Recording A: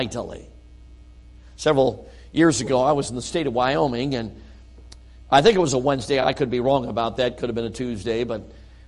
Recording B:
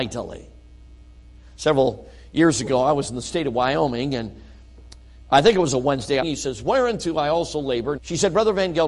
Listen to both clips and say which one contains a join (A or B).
B